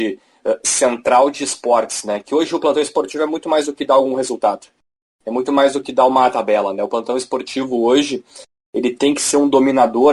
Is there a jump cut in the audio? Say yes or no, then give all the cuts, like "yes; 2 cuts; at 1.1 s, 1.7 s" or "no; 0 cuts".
no; 0 cuts